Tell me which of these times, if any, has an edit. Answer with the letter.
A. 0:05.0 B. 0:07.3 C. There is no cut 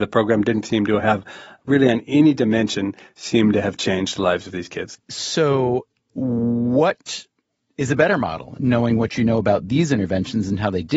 C